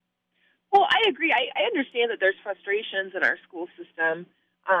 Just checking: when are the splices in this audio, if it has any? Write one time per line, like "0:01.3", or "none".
none